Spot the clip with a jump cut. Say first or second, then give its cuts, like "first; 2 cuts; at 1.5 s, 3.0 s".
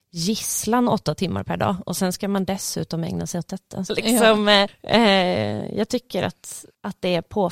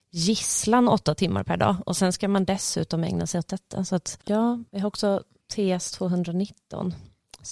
first; 1 cut; at 3.9 s